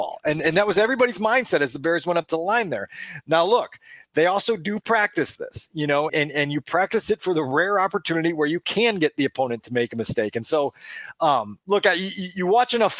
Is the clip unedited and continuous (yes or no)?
no